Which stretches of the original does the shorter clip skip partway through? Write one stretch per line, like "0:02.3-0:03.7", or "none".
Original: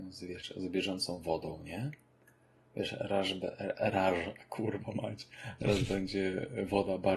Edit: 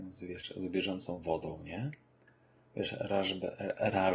none